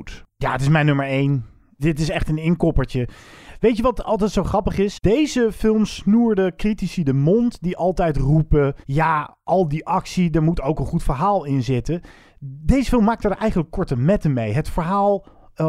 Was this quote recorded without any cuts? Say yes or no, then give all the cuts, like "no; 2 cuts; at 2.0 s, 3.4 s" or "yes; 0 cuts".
no; 1 cut; at 8.8 s